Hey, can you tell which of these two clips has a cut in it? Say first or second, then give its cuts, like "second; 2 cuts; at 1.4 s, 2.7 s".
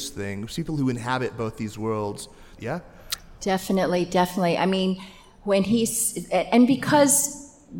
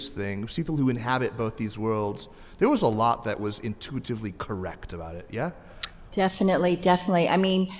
first; 1 cut; at 2.6 s